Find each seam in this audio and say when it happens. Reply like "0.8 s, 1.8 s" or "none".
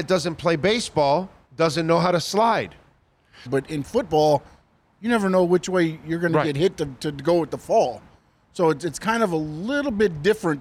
3.5 s

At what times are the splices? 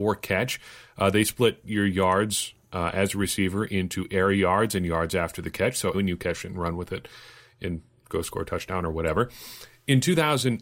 5.9 s

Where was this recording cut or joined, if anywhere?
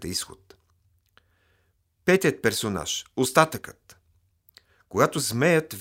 none

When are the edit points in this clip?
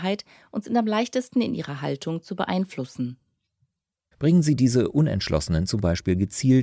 4.1 s

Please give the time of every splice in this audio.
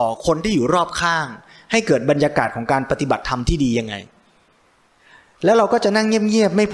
none

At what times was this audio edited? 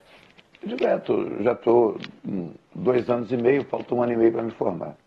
none

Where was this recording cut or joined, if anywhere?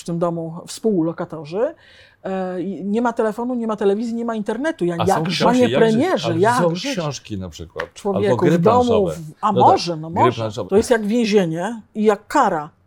5.4 s, 10.7 s

